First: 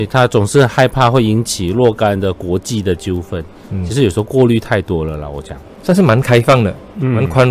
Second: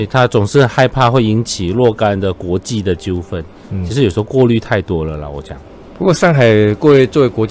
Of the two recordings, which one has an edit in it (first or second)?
first